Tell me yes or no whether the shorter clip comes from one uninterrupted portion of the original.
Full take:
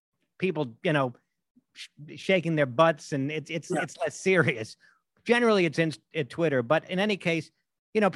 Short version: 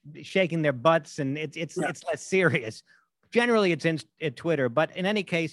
yes